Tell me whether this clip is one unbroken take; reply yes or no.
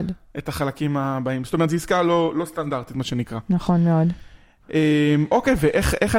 yes